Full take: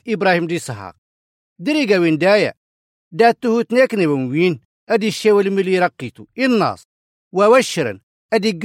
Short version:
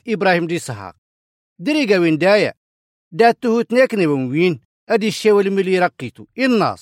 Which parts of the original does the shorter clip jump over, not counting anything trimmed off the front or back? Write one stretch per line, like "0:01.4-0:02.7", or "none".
none